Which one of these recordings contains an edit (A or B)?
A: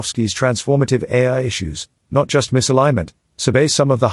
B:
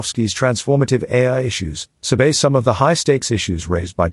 B